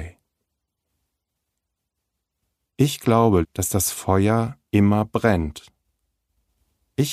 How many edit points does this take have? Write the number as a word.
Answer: two